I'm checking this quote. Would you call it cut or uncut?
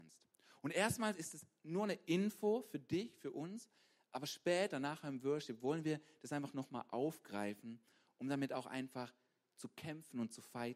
uncut